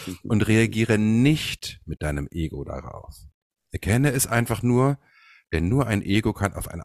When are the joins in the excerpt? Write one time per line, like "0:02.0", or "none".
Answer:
none

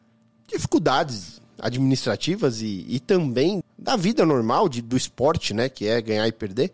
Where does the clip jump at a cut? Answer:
0:03.6

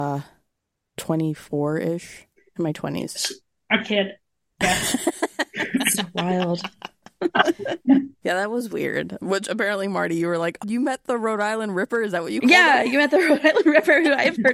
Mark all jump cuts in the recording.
0:10.6

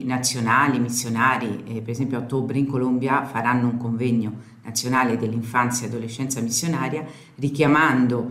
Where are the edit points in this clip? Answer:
none

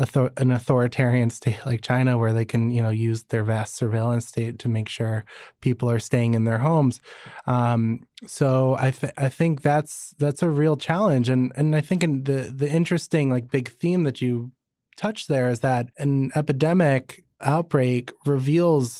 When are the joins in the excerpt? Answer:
none

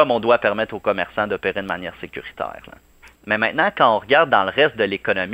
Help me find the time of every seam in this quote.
0:03.2

